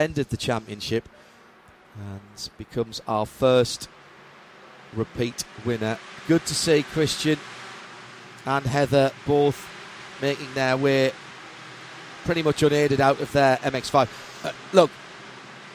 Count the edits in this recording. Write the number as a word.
zero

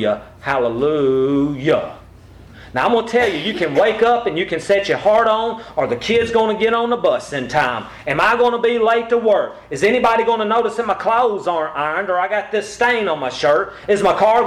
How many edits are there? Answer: zero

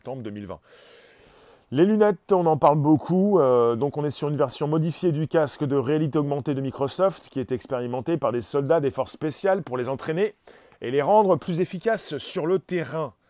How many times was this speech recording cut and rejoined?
zero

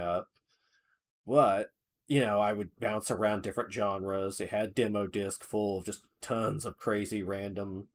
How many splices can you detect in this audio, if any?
zero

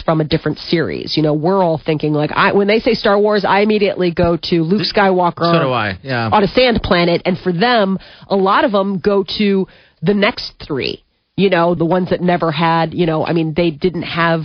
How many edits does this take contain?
one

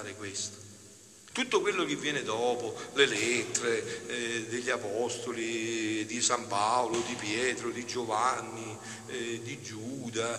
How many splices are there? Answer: one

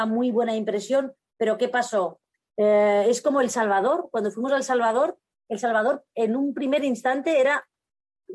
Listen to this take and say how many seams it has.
one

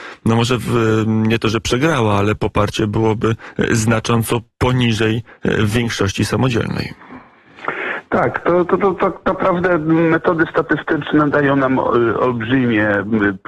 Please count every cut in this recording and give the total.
zero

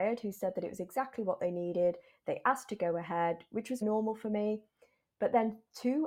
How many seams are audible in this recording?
one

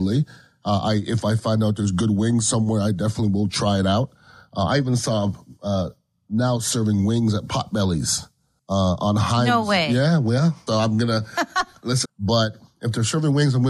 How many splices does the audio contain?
two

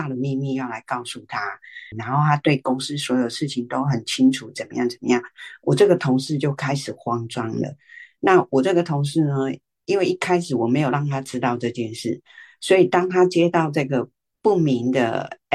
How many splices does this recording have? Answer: one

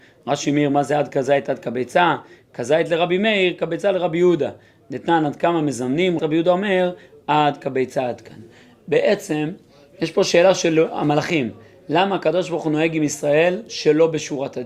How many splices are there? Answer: one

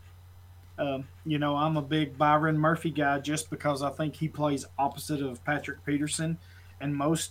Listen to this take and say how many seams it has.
one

